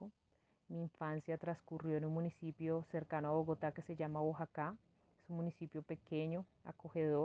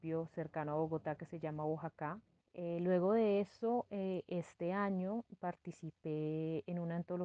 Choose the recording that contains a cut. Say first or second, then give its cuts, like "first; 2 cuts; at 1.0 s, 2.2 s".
second; 1 cut; at 2.4 s